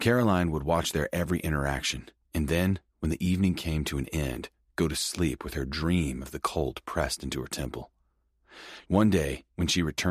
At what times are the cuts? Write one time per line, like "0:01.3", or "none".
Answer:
0:08.9